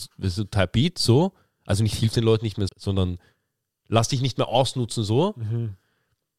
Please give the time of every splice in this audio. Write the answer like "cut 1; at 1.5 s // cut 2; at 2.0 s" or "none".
cut 1; at 2.7 s

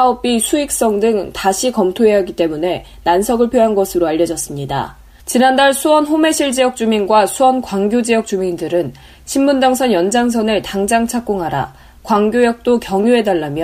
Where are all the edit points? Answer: cut 1; at 5.2 s

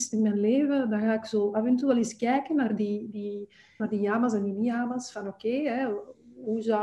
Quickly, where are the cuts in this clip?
cut 1; at 3.8 s

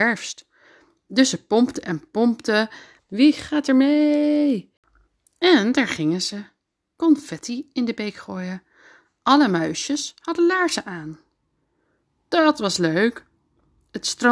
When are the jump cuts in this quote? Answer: cut 1; at 3.0 s

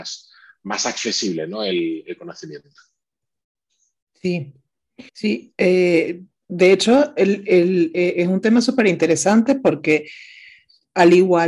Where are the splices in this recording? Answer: cut 1; at 5.1 s

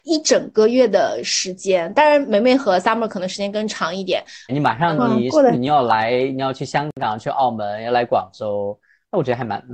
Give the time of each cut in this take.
cut 1; at 4.5 s // cut 2; at 5.5 s

